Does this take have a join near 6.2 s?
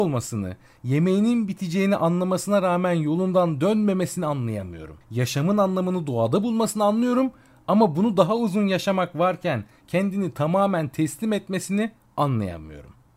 no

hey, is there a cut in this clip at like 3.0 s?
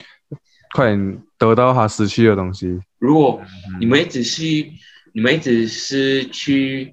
yes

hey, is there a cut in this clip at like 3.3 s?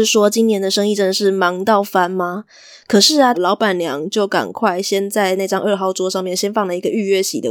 yes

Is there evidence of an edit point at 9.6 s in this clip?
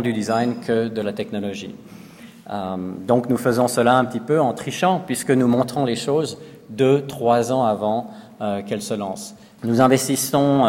yes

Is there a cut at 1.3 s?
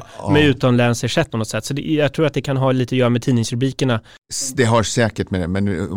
yes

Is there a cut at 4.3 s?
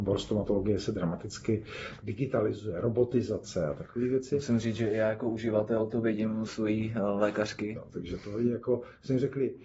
no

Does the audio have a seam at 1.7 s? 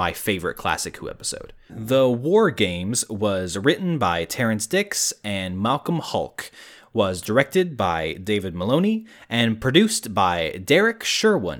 yes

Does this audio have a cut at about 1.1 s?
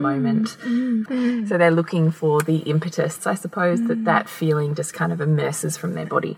yes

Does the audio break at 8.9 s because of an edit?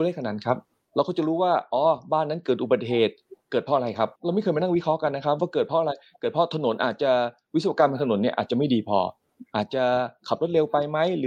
no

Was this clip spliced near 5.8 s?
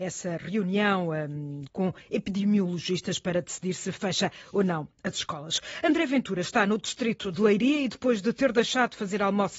no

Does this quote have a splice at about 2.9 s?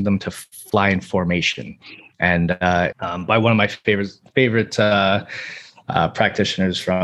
yes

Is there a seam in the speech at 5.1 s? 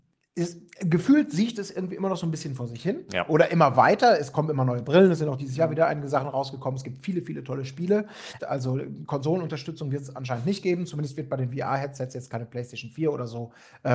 no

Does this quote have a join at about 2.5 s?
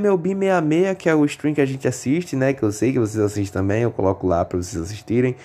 no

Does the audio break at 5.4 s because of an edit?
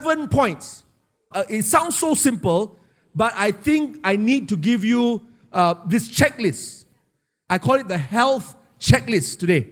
no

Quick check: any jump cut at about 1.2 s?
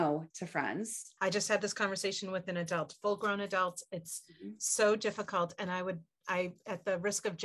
yes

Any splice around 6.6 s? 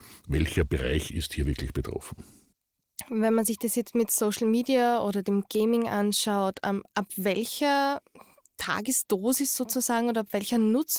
no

